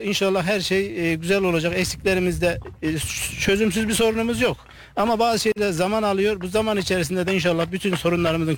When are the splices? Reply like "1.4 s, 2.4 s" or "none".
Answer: none